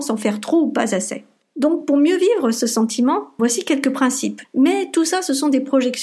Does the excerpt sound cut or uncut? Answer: cut